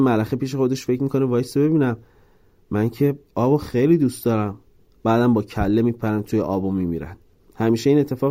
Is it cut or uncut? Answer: uncut